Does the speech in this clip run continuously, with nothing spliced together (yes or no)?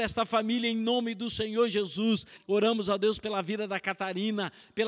no